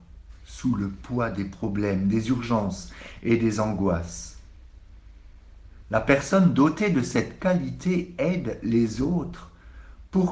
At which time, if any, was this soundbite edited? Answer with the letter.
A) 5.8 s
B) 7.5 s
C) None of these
A